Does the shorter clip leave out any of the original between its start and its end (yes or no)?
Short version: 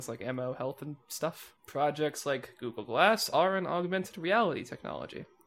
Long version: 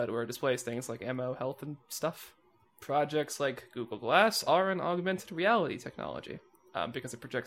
yes